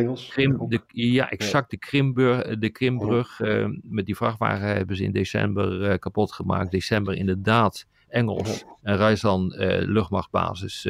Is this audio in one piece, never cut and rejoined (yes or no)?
no